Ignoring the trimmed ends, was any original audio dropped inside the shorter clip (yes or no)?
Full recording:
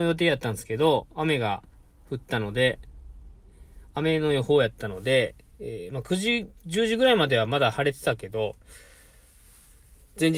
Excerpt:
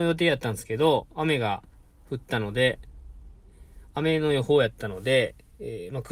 no